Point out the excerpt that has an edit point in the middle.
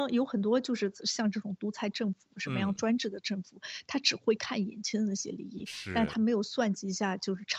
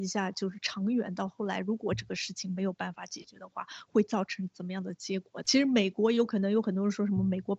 second; 1 cut; at 5.4 s

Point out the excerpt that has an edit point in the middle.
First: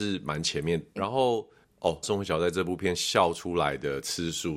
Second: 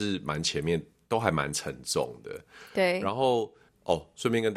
first; 2 cuts; at 1.0 s, 2.0 s

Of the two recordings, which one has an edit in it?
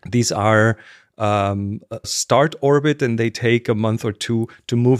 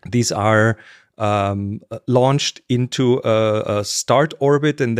first; 2 cuts; at 2.0 s, 3.2 s

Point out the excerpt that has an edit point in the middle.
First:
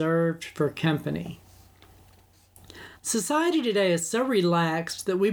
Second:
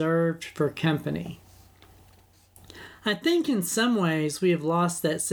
first; 1 cut; at 3.0 s

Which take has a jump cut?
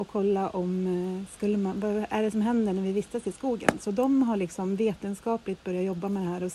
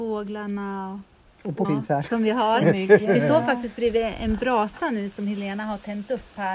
second; 1 cut; at 1.6 s

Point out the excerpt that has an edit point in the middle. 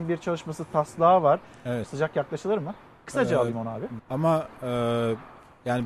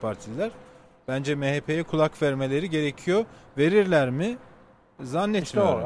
first; 2 cuts; at 1.8 s, 4.0 s

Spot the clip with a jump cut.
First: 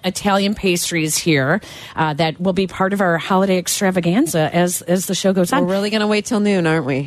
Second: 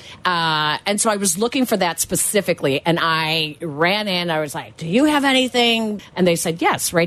second; 1 cut; at 6.0 s

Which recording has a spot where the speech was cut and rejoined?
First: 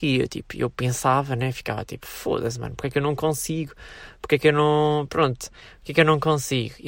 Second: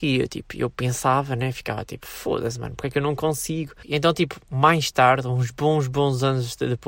second; 1 cut; at 3.8 s

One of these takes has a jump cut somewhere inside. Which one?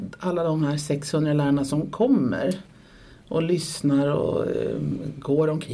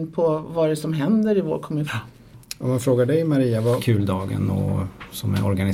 second; 2 cuts; at 1.9 s, 3.8 s

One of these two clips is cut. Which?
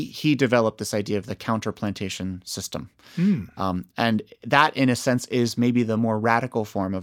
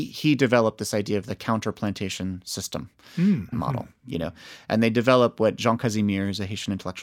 second; 1 cut; at 3.5 s

